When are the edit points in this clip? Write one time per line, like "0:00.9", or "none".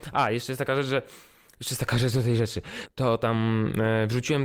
0:02.9

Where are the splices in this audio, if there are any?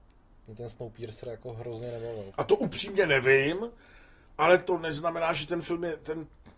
0:02.3

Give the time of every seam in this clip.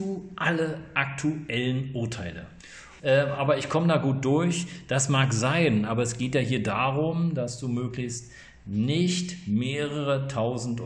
0:03.0

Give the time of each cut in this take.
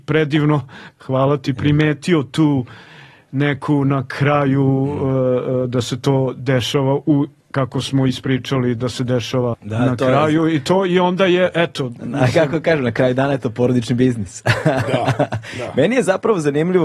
0:09.5

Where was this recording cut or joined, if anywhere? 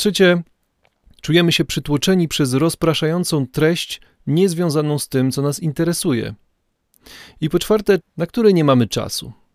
0:08.0

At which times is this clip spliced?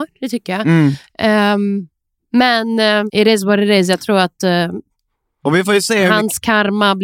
0:03.1

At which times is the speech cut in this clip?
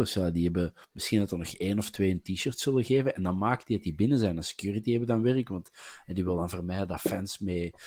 none

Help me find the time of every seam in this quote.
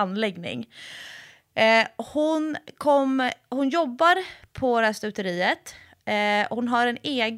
none

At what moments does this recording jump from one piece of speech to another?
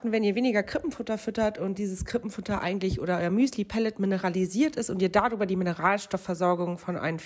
none

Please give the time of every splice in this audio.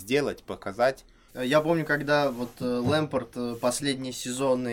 0:01.3

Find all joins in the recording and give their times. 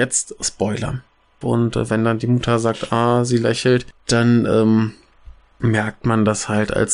0:01.4

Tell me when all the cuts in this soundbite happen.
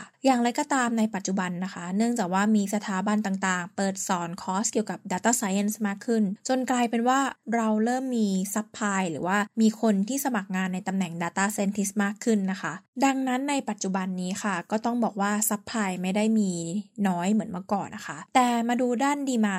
0:17.9

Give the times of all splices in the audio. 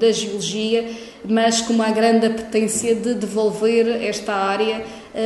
none

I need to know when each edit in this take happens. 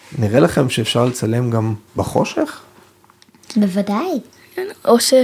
0:01.9

